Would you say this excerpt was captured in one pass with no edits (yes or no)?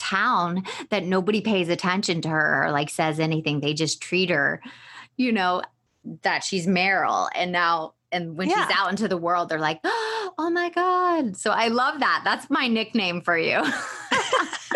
yes